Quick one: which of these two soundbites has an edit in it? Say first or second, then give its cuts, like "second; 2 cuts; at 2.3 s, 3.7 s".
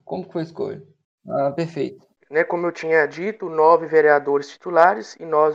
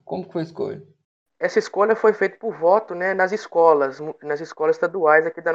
first; 1 cut; at 1.2 s